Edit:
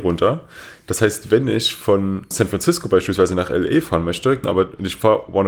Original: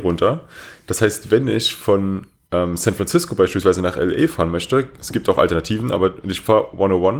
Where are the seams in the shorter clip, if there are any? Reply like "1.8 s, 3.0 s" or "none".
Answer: 2.3 s, 4.4 s